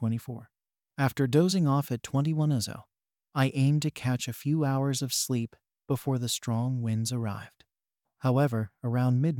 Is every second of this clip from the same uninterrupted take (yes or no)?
yes